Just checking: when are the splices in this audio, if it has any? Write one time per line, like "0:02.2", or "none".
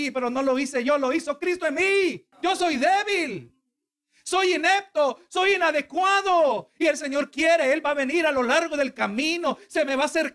0:02.3